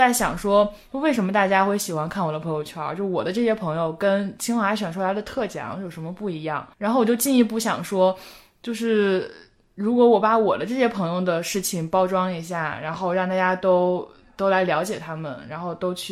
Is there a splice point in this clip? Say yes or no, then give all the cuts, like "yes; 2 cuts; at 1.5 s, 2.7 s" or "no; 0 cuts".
yes; 1 cut; at 6.7 s